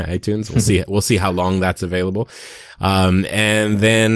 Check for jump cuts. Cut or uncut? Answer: uncut